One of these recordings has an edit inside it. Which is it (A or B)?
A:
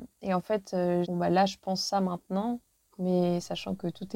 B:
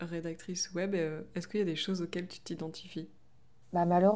A